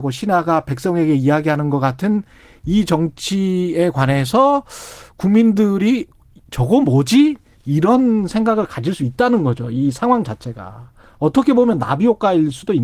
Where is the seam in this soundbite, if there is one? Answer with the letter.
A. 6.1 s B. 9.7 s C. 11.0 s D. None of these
D